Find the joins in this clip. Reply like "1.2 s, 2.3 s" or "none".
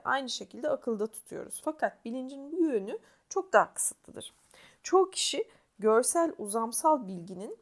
none